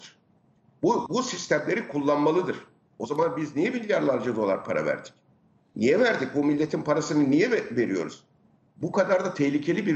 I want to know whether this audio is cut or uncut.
cut